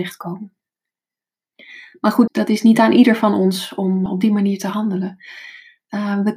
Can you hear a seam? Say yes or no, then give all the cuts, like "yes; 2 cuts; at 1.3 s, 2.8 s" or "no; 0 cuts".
yes; 2 cuts; at 2.3 s, 4.1 s